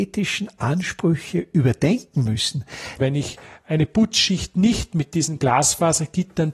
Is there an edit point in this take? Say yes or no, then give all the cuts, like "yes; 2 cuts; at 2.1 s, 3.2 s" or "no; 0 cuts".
yes; 1 cut; at 3.0 s